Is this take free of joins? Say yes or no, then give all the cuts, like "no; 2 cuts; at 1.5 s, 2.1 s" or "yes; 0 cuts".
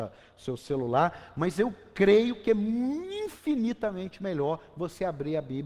yes; 0 cuts